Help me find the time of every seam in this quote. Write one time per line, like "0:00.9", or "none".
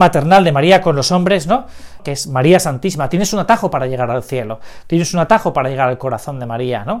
0:02.0